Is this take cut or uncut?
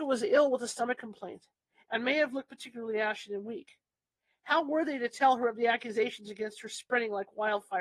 uncut